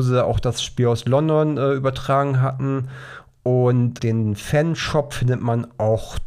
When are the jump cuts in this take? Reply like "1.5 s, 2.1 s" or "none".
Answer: 4.0 s

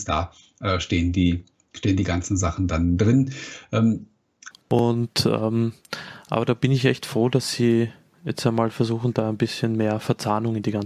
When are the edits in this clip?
4.5 s

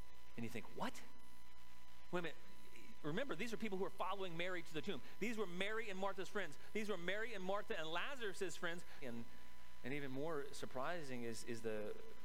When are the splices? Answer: 9.0 s

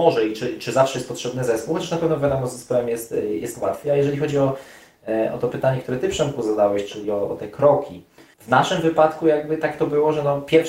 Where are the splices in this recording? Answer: none

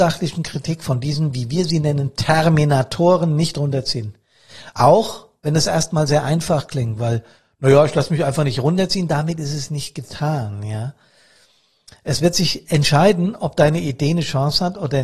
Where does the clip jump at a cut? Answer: none

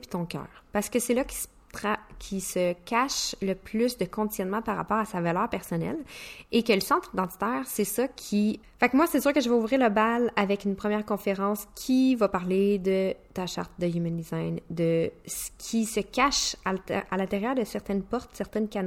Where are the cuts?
8.6 s

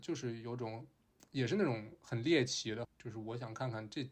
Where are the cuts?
2.8 s

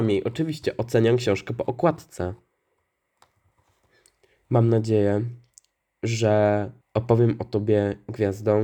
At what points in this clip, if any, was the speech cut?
6.8 s

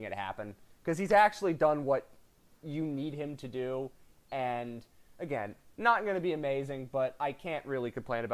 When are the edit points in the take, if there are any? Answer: none

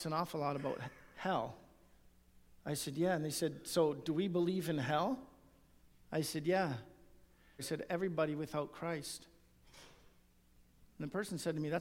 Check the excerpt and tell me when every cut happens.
7.6 s

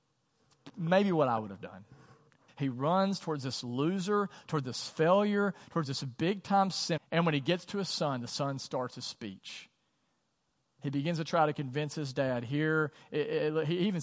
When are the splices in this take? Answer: 2.5 s, 7.0 s

